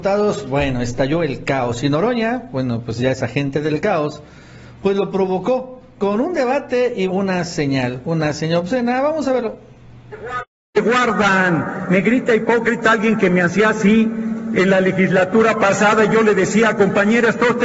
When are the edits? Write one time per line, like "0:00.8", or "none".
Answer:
0:07.1